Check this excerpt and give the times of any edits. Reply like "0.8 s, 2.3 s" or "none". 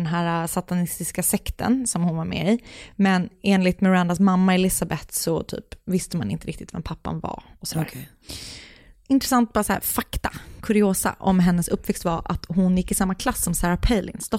none